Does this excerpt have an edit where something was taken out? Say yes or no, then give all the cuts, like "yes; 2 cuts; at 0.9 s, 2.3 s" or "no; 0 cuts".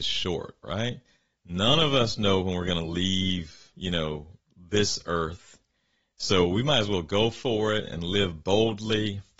no; 0 cuts